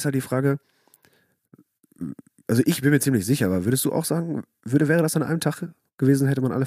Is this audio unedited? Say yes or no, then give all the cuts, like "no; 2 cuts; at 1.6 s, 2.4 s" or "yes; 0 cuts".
yes; 0 cuts